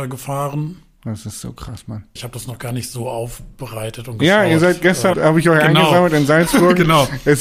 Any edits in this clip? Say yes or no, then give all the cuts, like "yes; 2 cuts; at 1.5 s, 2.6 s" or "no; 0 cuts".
yes; 2 cuts; at 2.2 s, 5.1 s